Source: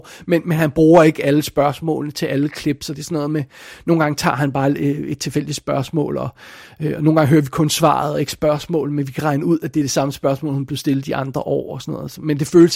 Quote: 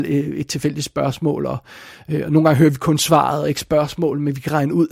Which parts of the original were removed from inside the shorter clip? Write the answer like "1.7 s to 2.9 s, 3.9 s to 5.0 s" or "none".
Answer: none